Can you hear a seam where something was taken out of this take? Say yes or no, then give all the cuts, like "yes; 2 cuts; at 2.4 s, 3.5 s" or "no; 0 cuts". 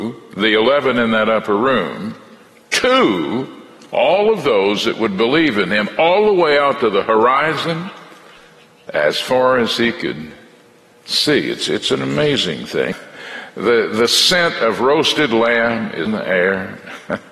yes; 2 cuts; at 12.9 s, 16.1 s